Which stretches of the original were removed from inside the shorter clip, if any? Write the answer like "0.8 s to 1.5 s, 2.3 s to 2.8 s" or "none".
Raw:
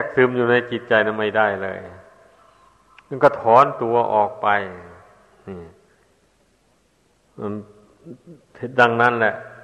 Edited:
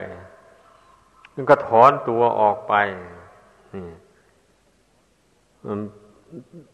none